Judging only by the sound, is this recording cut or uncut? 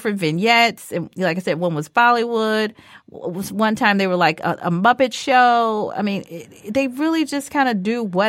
uncut